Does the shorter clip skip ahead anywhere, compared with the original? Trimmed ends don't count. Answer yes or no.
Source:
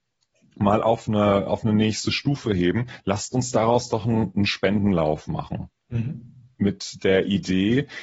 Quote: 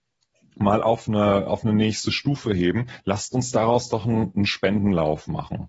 no